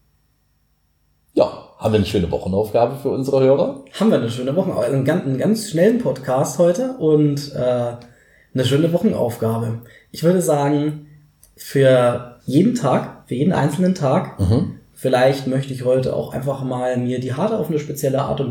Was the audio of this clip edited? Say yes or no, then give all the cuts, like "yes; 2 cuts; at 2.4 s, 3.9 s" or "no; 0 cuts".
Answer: yes; 2 cuts; at 12.4 s, 14.9 s